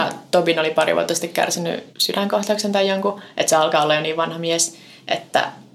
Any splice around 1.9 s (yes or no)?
yes